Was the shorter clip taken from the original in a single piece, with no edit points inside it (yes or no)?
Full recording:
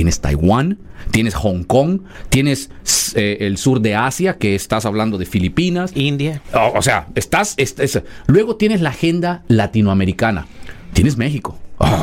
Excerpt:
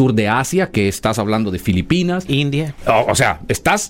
yes